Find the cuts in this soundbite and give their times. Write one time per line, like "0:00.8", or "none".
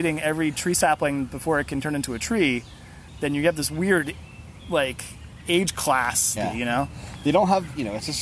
0:06.4